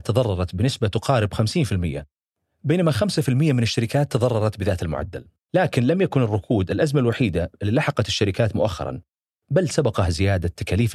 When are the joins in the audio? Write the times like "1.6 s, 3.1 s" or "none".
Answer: 5.4 s

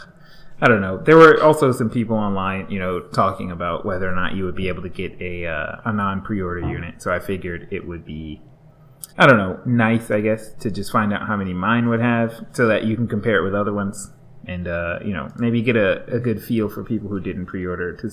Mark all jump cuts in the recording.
9.1 s

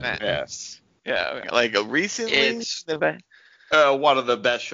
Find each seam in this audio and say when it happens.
1.4 s

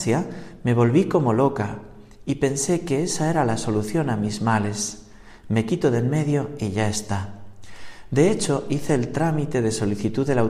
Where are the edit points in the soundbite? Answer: none

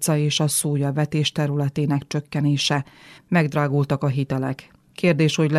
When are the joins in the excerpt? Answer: 3.2 s

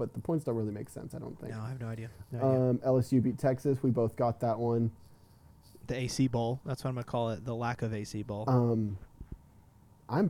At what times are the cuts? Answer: none

